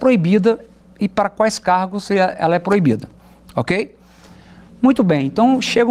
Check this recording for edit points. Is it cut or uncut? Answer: uncut